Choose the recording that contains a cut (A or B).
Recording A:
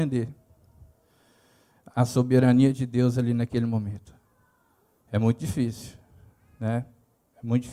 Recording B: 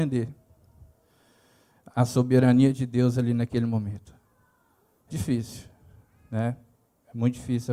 B